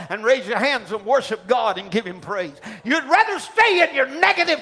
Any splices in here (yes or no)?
no